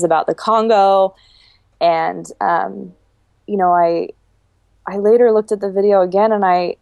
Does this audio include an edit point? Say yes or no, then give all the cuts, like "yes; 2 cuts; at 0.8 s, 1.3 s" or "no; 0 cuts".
no; 0 cuts